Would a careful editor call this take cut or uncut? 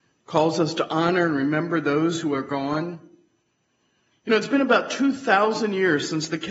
uncut